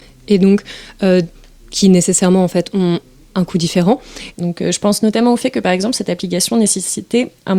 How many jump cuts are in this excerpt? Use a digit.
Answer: 1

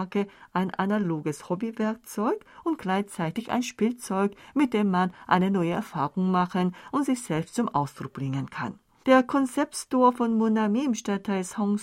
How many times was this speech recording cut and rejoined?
1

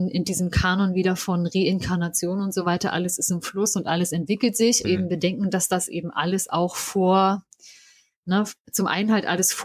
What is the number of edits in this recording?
1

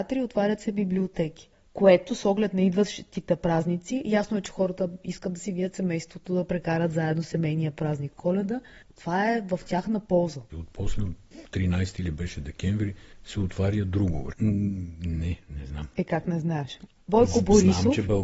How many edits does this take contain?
2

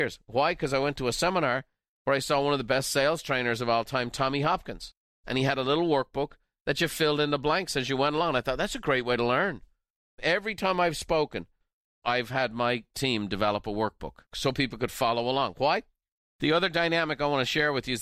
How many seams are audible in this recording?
2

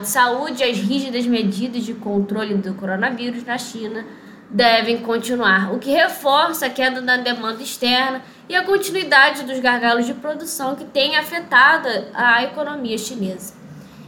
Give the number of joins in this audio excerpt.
0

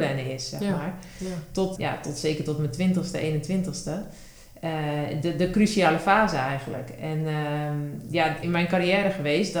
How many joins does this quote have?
2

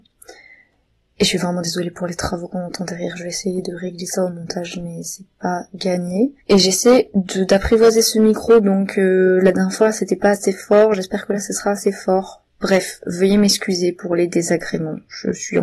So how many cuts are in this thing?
1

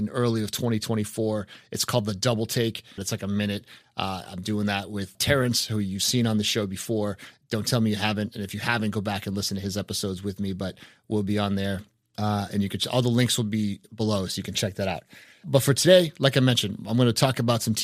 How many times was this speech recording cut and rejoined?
1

